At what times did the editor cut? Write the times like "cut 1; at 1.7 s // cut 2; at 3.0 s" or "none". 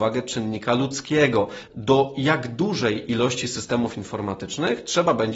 cut 1; at 1.7 s